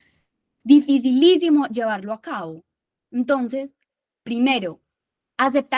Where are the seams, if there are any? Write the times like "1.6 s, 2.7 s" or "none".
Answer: none